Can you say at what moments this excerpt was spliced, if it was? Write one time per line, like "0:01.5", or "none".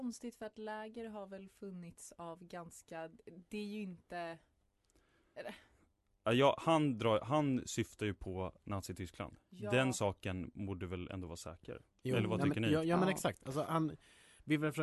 0:13.6